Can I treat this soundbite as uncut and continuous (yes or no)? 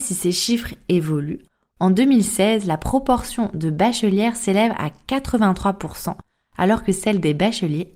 yes